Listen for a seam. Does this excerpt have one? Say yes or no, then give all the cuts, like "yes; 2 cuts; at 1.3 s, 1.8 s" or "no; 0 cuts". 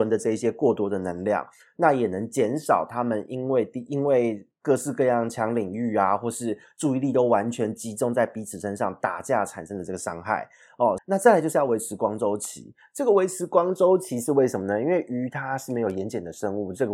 yes; 1 cut; at 11.0 s